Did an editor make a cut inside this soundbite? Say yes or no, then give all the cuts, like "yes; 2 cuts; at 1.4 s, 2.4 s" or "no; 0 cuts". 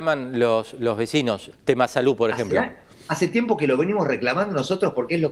yes; 1 cut; at 1.5 s